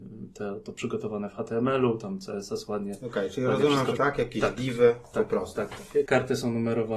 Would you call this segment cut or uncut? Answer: cut